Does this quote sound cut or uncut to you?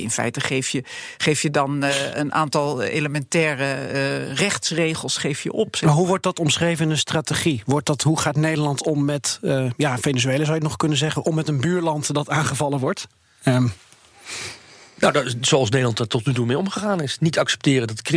uncut